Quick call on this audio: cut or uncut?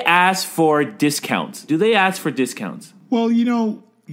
cut